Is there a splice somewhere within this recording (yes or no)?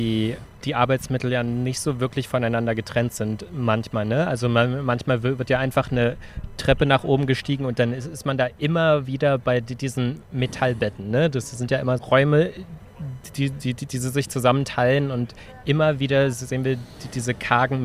yes